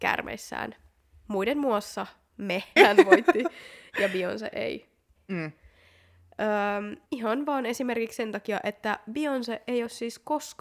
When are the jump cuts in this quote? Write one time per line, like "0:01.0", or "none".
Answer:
0:02.8
0:05.2
0:07.1